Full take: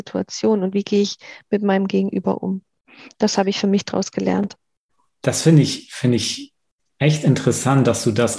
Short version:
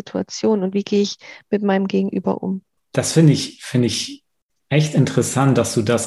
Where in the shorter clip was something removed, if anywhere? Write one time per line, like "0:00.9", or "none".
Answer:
0:02.8